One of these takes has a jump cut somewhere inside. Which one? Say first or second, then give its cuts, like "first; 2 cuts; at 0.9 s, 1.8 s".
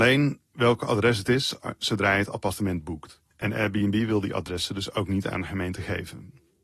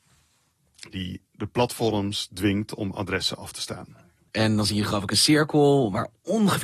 second; 2 cuts; at 1.2 s, 4.3 s